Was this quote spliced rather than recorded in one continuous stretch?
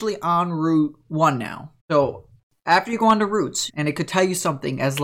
yes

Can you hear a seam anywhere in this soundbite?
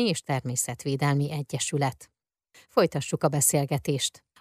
no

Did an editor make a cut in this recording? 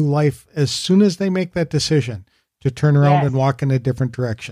no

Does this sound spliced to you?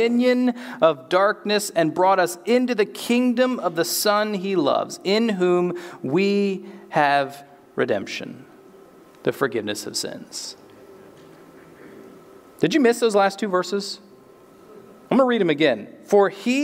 no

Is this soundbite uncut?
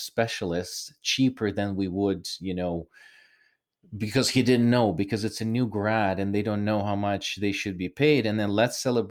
yes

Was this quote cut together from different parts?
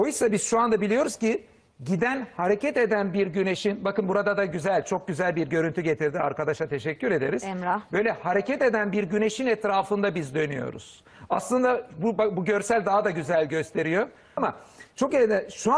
yes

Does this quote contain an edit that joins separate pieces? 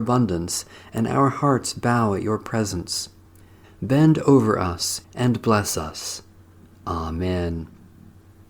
yes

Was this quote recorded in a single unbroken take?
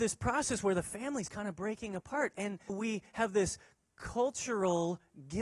no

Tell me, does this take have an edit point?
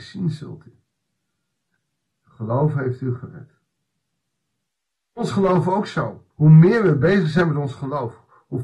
yes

